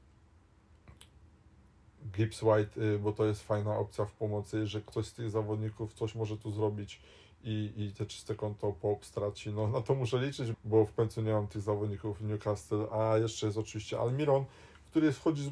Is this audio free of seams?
no; 1 cut; at 10.5 s

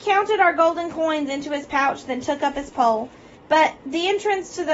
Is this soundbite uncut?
no; 1 cut; at 3.3 s

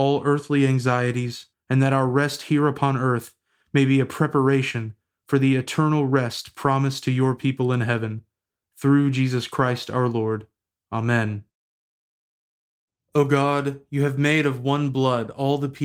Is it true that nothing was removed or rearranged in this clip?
no; 1 cut; at 1.5 s

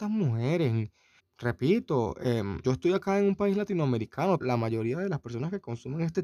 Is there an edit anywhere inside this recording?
yes; 3 cuts; at 1.2 s, 2.6 s, 4.4 s

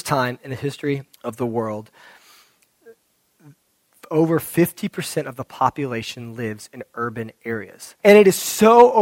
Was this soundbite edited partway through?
yes; 2 cuts; at 1.1 s, 8.0 s

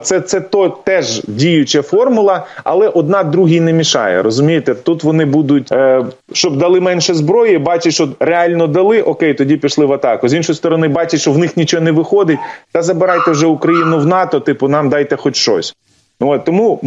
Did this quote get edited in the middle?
yes; 1 cut; at 5.7 s

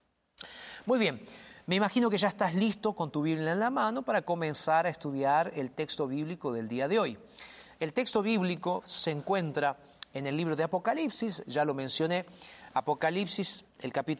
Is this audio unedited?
yes; 0 cuts

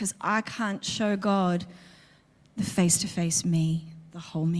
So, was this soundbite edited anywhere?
no; 0 cuts

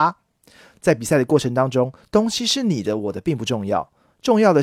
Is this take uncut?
yes; 0 cuts

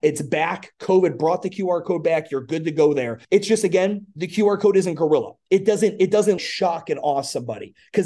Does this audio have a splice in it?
yes; 2 cuts; at 3.2 s, 6.4 s

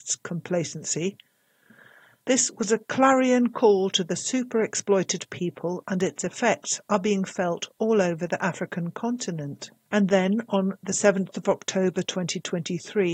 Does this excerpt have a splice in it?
no; 0 cuts

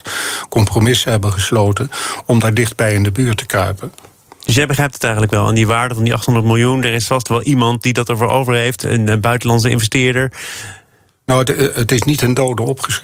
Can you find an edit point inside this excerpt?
no; 0 cuts

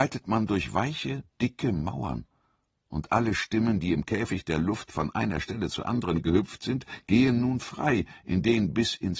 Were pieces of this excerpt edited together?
no; 0 cuts

